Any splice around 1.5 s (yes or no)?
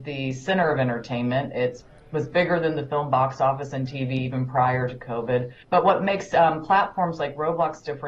no